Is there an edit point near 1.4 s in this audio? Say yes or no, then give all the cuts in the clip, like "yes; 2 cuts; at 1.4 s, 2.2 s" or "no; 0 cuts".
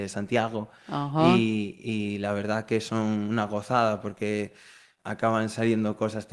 no; 1 cut; at 5.0 s